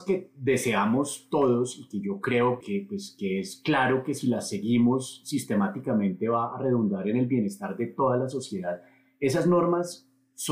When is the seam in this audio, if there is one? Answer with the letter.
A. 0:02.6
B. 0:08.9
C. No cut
A